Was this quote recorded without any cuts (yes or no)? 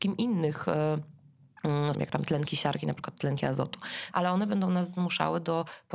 no